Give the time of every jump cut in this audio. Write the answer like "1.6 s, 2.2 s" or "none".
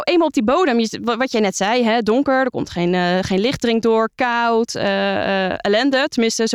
none